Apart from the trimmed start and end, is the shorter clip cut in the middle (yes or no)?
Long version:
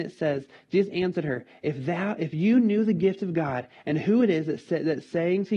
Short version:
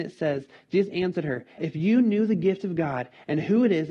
yes